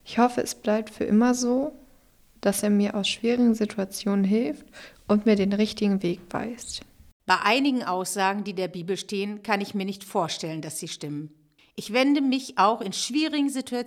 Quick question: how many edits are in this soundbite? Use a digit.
2